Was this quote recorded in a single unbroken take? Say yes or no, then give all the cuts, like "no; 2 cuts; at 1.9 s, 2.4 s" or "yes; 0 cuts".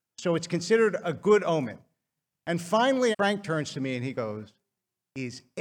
no; 1 cut; at 3.1 s